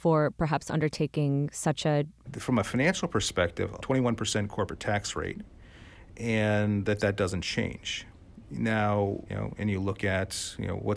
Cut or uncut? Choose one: cut